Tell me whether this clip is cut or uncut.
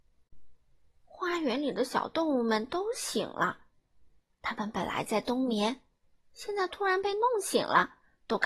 uncut